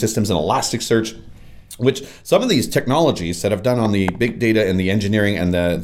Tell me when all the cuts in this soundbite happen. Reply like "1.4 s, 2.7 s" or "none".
none